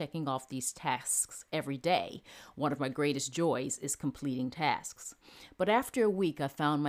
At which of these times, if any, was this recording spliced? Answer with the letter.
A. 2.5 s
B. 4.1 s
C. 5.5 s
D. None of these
D